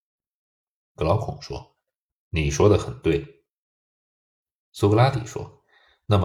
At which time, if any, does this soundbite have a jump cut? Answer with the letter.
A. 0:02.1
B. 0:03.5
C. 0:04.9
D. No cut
D